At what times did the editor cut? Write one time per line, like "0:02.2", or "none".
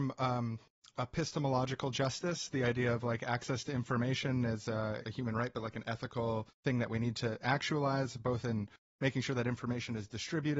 0:05.0